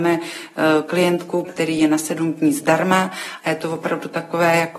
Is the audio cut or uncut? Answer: cut